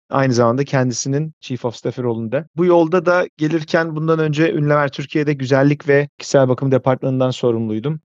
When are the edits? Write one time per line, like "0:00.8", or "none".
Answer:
0:02.5